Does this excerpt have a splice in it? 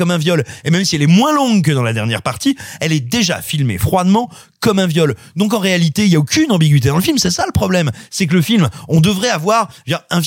no; 0 cuts

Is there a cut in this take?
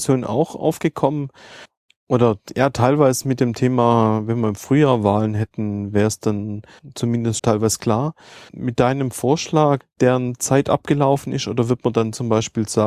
yes; 2 cuts; at 7.4 s, 9.8 s

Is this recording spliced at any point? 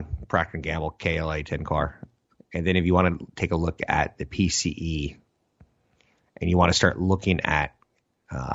yes; 1 cut; at 2.3 s

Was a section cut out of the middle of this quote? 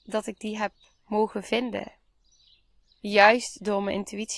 no; 0 cuts

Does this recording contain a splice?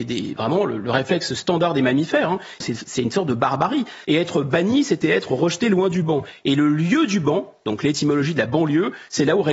yes; 2 cuts; at 2.6 s, 4.0 s

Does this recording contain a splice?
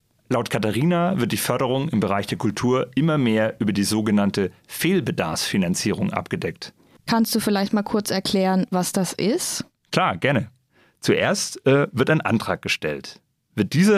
yes; 1 cut; at 7.0 s

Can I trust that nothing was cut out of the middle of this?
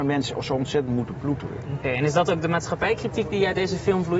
yes; 0 cuts

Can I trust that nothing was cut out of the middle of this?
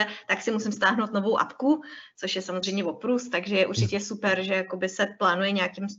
yes; 0 cuts

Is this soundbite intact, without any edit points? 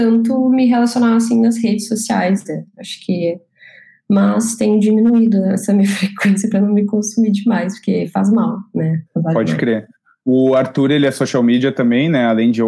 no; 1 cut; at 9.1 s

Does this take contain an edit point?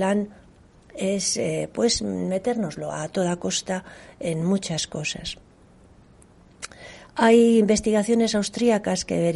no; 0 cuts

